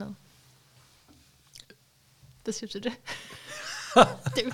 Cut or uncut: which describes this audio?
uncut